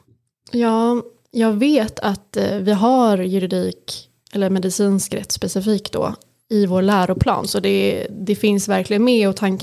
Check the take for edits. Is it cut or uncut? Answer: uncut